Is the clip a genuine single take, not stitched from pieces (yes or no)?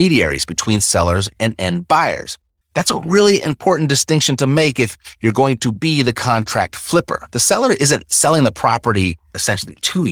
no